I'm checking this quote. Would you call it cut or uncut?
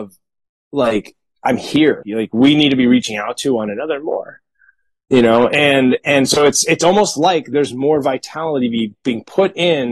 cut